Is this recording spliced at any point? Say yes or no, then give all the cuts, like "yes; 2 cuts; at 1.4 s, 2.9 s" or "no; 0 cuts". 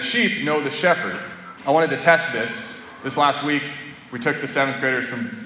yes; 1 cut; at 1.6 s